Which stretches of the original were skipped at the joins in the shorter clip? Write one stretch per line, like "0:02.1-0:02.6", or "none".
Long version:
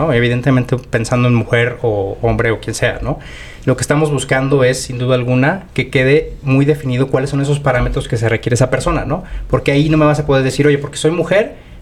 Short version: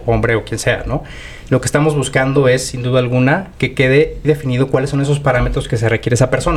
0:06.4-0:06.6